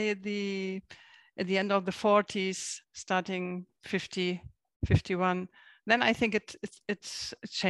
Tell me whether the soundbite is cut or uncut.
uncut